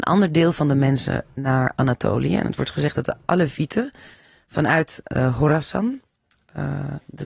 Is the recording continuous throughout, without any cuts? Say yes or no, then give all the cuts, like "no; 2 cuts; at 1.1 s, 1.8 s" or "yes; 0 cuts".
yes; 0 cuts